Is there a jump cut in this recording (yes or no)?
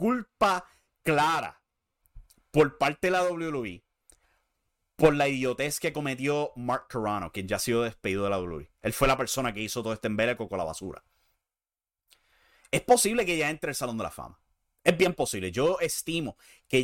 no